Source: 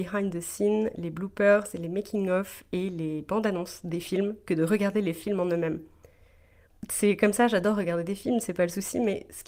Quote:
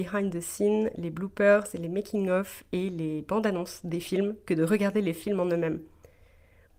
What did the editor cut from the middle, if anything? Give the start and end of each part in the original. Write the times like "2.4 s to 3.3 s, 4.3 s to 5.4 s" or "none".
none